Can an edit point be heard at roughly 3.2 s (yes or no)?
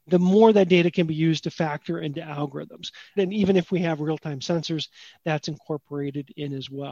yes